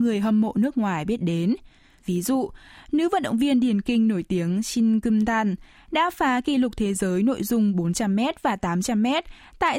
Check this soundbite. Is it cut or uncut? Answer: uncut